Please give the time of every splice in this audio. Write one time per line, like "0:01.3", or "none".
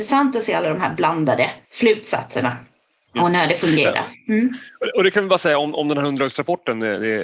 0:01.6